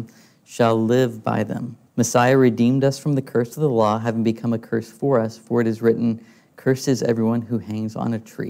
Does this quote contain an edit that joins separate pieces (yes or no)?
yes